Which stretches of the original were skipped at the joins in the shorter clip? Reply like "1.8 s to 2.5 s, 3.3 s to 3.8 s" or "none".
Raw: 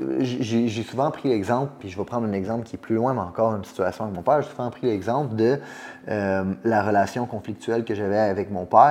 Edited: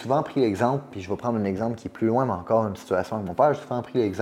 none